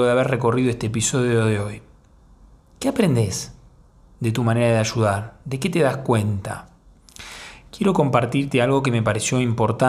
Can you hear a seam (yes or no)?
no